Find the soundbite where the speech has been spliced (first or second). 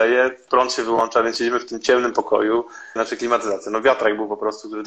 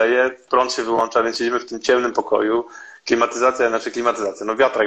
first